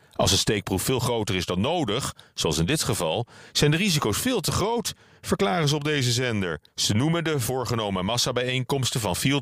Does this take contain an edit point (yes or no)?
no